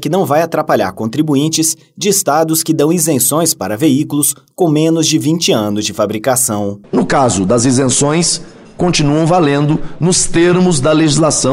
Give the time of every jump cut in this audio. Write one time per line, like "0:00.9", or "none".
0:06.8